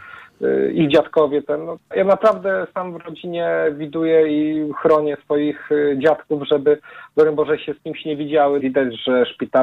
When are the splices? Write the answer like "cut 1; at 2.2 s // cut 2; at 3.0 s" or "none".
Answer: cut 1; at 1.9 s // cut 2; at 8.6 s